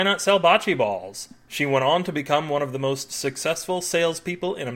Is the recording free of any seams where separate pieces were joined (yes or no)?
yes